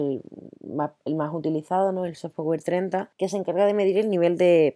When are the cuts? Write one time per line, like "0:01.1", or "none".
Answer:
0:03.1